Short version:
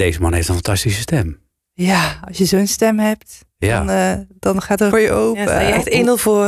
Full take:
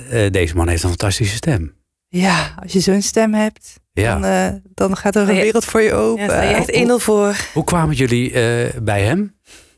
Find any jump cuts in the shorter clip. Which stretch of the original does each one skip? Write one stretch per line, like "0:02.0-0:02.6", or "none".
0:05.3-0:05.7